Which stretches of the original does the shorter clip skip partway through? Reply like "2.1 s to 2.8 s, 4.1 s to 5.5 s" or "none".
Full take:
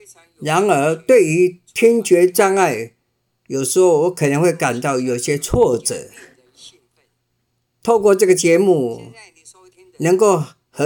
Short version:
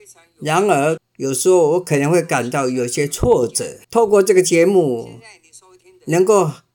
1.0 s to 3.3 s, 6.1 s to 7.8 s